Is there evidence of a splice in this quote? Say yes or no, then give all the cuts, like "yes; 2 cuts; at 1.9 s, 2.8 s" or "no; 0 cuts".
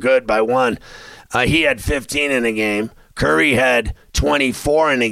no; 0 cuts